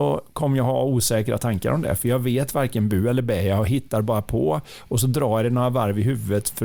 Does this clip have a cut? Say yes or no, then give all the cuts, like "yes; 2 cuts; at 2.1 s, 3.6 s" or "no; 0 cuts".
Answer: no; 0 cuts